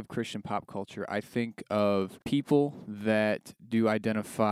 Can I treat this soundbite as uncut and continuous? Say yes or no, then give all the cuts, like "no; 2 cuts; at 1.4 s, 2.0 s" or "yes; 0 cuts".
no; 1 cut; at 2.2 s